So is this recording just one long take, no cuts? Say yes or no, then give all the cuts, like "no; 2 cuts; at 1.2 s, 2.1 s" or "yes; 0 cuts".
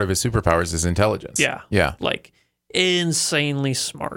yes; 0 cuts